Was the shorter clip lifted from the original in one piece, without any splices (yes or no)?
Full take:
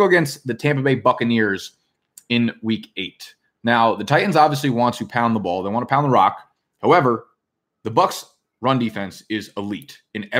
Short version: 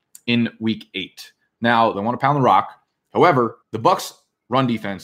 no